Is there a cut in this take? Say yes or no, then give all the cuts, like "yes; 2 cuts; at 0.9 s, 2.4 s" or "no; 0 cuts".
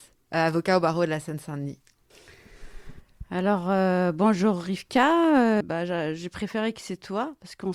yes; 1 cut; at 5.6 s